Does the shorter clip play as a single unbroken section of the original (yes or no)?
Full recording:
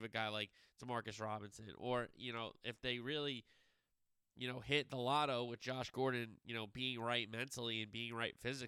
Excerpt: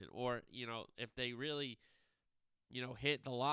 yes